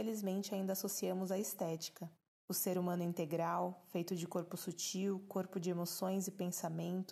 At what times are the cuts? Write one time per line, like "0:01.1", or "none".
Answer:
0:02.3

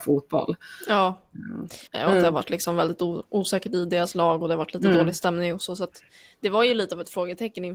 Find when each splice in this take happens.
0:01.9

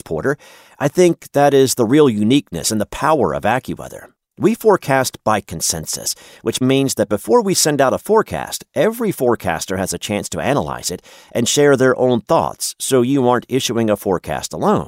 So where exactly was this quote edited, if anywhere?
0:06.6

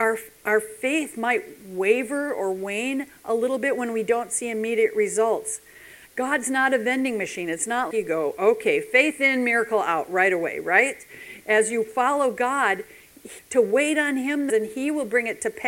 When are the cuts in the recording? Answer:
0:07.9
0:13.4
0:14.5

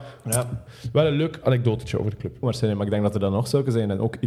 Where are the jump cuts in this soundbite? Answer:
0:02.4

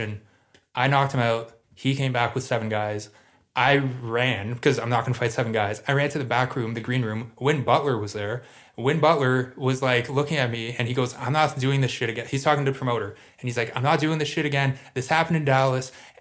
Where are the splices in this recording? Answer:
none

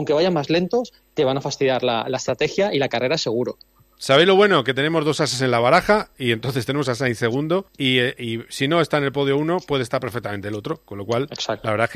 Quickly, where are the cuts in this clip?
0:07.7

